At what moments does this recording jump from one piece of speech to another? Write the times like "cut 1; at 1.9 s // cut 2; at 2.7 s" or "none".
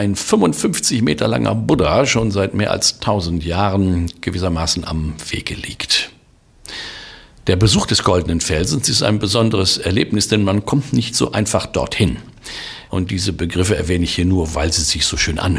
cut 1; at 12.9 s